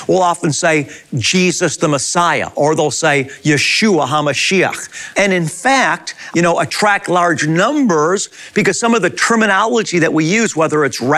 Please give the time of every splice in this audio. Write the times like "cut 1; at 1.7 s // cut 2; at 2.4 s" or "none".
cut 1; at 5.1 s // cut 2; at 6.3 s